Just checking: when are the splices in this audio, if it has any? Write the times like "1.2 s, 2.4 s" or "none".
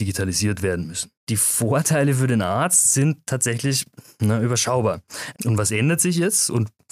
1.2 s, 5.3 s